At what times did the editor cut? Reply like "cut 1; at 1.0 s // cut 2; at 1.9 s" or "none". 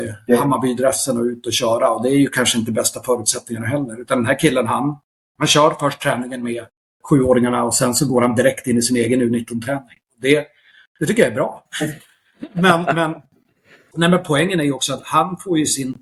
cut 1; at 11.7 s